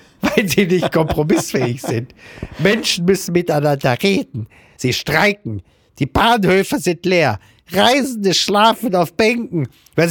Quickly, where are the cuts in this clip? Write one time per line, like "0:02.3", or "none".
0:04.8